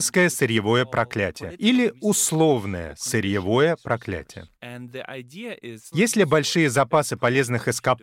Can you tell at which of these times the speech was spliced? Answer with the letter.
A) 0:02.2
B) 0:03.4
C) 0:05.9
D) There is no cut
C